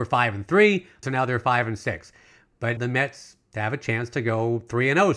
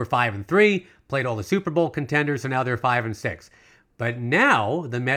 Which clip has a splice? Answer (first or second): first